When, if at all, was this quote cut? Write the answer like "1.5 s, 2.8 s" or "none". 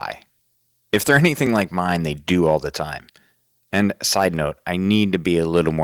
none

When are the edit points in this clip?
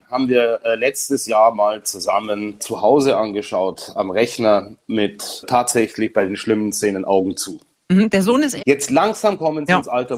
8.6 s

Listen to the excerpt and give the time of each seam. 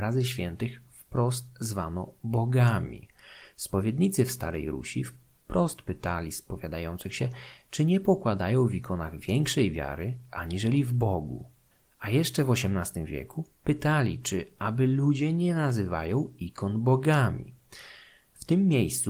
none

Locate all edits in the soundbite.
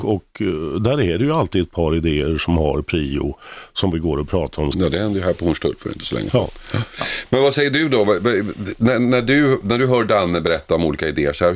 4.7 s

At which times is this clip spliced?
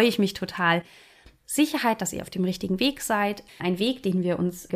1.4 s, 3.5 s

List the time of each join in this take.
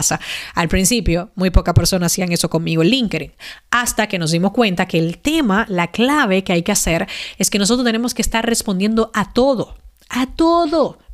none

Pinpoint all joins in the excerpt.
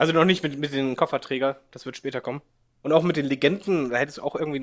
2.6 s

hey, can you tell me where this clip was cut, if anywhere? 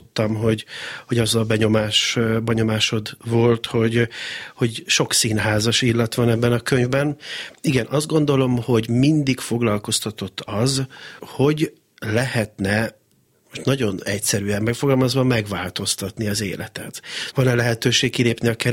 11.2 s, 17.3 s

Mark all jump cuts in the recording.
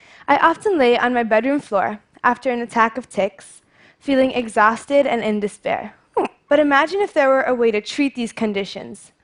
6.5 s

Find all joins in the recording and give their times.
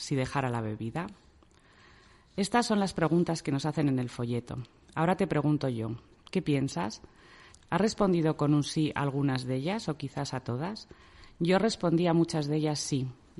7.5 s

